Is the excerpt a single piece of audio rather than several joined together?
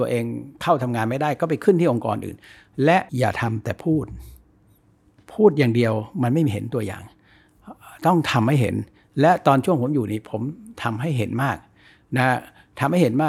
no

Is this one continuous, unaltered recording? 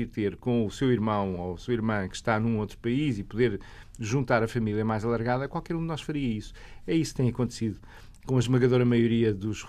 yes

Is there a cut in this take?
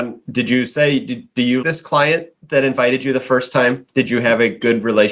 yes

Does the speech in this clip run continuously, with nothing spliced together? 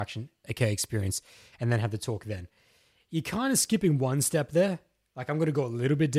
yes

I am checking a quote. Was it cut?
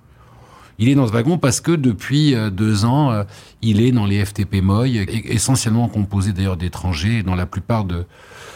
yes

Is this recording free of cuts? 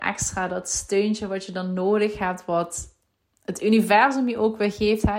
yes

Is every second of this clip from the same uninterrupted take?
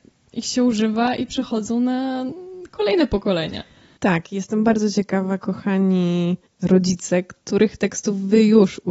yes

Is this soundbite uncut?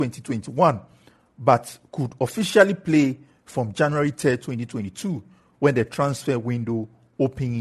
yes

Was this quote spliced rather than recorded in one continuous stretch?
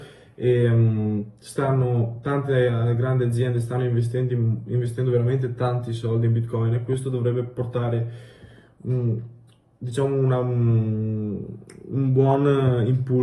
no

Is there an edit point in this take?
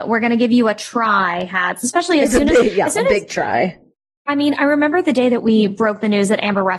no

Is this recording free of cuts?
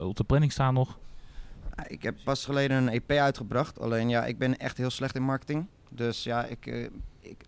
yes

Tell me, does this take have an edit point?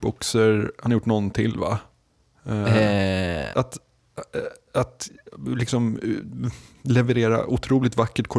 yes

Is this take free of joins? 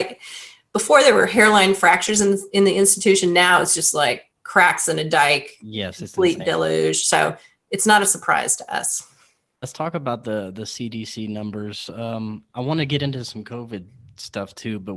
yes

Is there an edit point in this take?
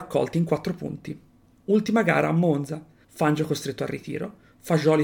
yes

